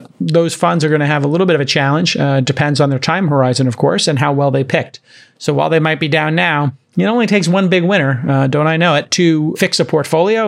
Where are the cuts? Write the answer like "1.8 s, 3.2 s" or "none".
none